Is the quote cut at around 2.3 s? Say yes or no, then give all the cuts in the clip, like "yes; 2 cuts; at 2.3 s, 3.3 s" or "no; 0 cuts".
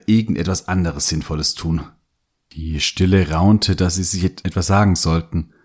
yes; 1 cut; at 2.3 s